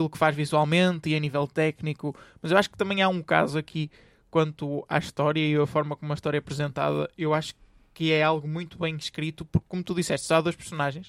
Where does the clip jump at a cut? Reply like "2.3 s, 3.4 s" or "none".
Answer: none